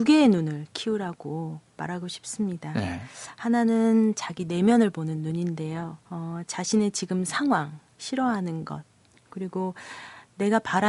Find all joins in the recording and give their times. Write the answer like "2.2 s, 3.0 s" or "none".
6.0 s, 7.9 s